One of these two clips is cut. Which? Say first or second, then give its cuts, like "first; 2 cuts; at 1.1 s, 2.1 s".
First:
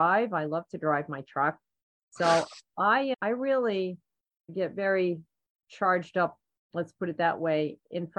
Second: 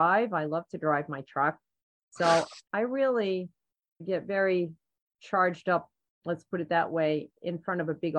second; 1 cut; at 2.7 s